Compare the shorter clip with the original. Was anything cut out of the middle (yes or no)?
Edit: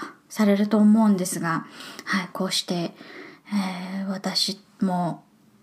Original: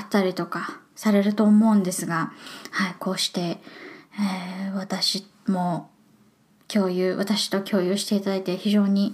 no